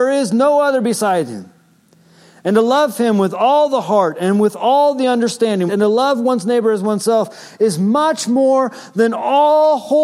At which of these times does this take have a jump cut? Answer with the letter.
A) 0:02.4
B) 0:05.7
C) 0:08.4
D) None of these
B